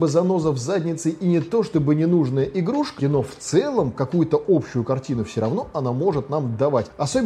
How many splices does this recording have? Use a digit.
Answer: 1